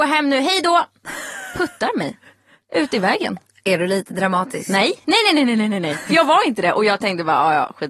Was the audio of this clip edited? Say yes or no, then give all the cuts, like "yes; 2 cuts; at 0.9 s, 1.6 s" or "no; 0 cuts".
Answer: no; 0 cuts